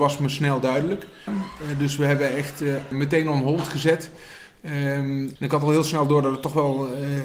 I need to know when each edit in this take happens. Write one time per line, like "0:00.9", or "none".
0:01.3
0:02.9
0:05.4